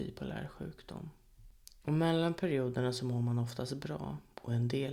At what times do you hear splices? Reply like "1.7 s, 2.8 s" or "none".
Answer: 1.8 s